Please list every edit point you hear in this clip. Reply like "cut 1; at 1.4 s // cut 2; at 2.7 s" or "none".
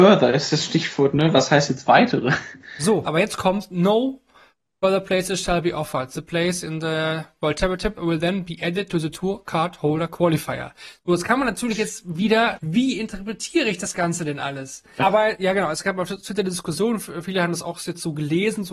cut 1; at 3.1 s // cut 2; at 12.6 s // cut 3; at 15.0 s